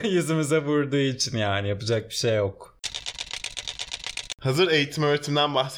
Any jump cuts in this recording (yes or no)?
no